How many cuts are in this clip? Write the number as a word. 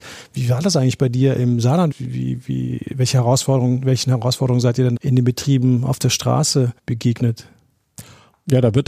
three